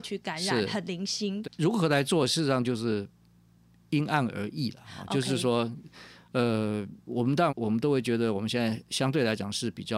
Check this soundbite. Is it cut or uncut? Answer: cut